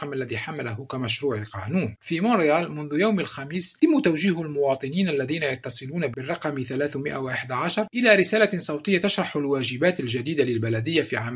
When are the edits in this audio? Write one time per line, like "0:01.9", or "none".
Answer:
0:02.0
0:03.8